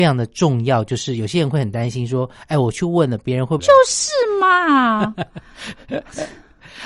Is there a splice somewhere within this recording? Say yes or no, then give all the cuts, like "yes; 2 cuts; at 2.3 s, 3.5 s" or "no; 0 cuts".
yes; 1 cut; at 3.6 s